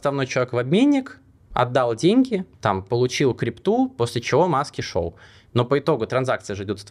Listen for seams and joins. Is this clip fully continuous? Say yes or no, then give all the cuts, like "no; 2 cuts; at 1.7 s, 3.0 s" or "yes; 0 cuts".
no; 1 cut; at 2.5 s